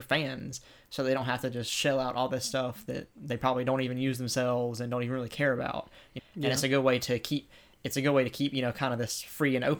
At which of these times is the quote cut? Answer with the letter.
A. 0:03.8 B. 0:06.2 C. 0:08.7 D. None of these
B